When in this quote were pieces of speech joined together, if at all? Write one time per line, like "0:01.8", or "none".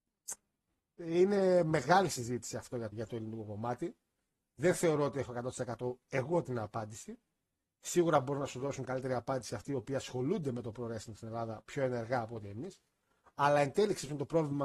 0:02.9